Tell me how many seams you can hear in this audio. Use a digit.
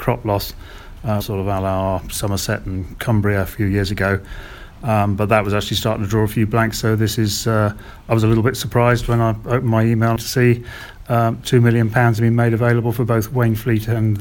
1